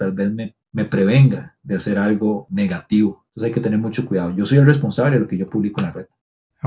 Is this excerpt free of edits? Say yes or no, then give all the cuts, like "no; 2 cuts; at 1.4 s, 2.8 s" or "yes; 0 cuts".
yes; 0 cuts